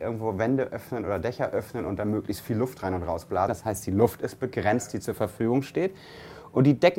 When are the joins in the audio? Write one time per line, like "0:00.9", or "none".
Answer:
0:03.5